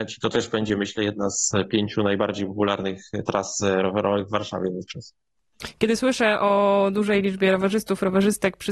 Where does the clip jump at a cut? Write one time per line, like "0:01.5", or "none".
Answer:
none